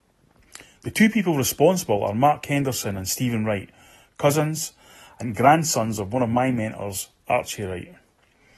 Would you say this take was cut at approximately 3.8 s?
no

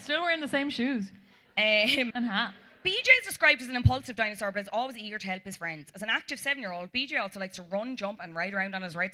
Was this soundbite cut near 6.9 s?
no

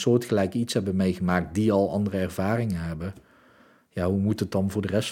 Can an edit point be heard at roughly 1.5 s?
no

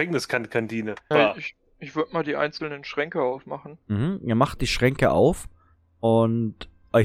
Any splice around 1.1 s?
yes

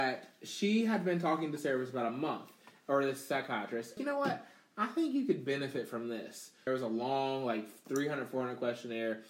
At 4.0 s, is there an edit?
yes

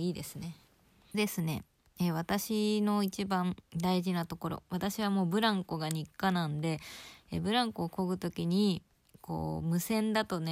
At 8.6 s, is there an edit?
no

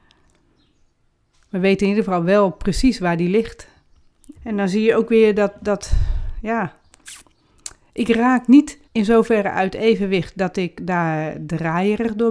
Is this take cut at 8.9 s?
yes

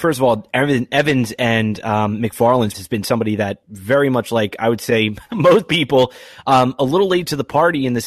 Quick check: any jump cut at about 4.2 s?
no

